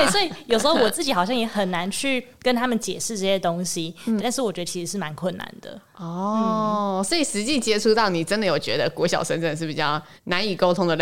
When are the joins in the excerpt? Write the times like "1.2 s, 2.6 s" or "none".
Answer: 4.2 s